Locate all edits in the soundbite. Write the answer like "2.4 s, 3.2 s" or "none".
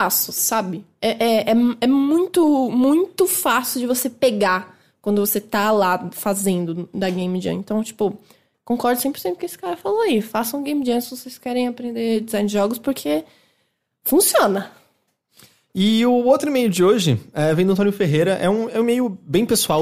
none